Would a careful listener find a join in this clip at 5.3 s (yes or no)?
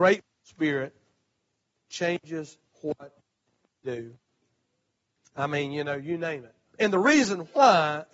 yes